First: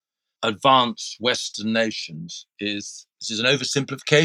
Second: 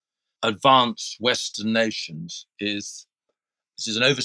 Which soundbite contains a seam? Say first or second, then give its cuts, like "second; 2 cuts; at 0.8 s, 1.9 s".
first; 1 cut; at 3.1 s